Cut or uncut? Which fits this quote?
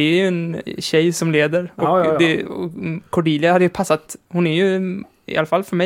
uncut